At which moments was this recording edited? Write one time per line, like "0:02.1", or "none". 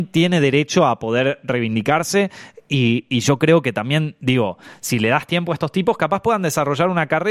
none